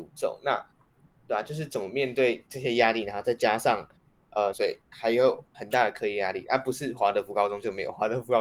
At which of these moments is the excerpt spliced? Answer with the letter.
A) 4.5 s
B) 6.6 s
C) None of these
A